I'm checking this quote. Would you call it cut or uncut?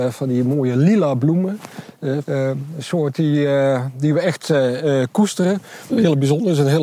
cut